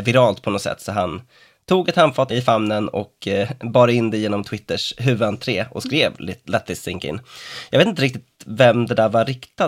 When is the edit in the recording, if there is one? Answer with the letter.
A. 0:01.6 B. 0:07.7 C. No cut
C